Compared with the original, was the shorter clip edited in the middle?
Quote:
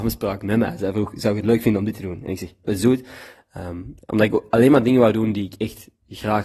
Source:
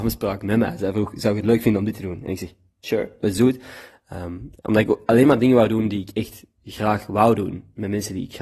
yes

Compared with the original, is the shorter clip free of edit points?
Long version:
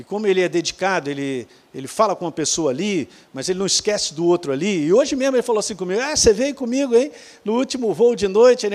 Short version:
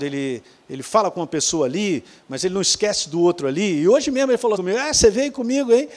no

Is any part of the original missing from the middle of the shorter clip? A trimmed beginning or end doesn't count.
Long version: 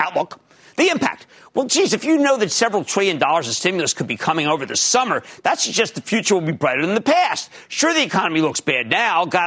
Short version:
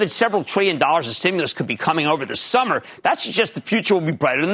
no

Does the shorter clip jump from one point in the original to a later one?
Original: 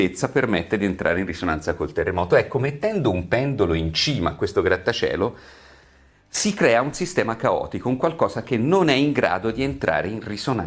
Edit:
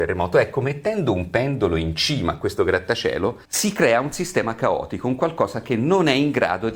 yes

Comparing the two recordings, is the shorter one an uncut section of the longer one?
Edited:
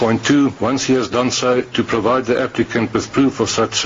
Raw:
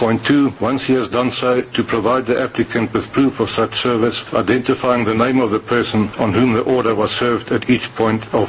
yes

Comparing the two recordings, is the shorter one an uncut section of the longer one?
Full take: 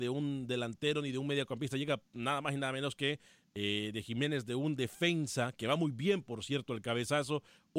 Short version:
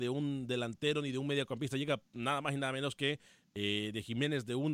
yes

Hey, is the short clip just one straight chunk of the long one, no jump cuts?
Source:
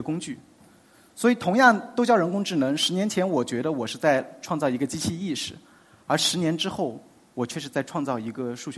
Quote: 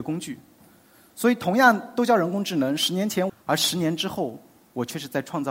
no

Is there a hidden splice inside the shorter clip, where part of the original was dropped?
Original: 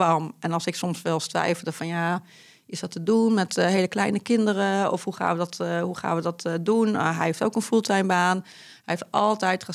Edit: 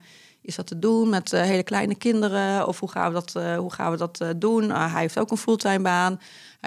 no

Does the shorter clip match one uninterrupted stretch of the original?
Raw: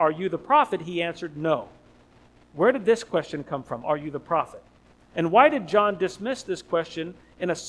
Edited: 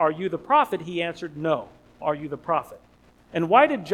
no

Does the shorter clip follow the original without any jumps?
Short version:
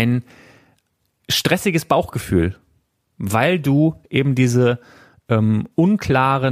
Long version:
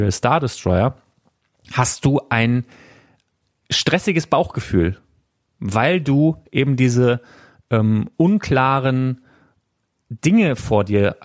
yes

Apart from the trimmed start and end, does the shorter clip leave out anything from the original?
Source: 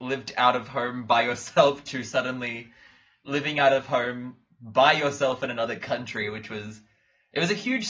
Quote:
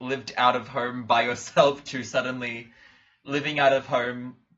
no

